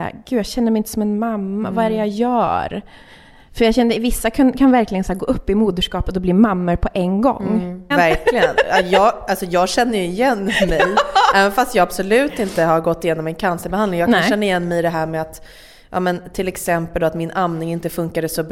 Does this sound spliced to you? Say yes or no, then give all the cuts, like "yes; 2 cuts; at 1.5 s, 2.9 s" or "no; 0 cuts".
yes; 1 cut; at 7.9 s